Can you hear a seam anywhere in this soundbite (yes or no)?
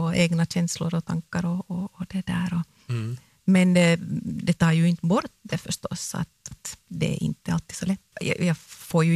yes